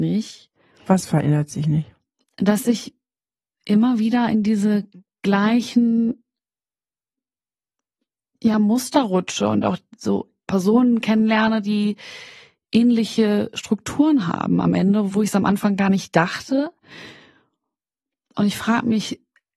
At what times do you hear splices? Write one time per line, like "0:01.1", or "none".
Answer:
none